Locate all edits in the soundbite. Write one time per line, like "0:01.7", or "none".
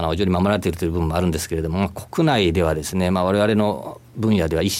none